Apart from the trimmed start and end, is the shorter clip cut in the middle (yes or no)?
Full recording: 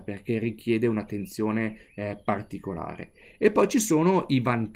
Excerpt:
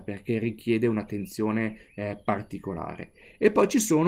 no